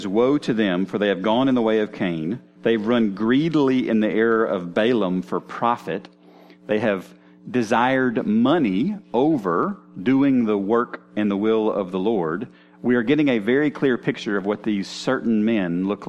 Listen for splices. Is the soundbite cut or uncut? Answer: cut